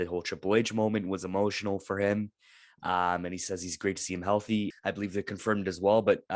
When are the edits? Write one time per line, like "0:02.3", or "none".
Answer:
0:04.7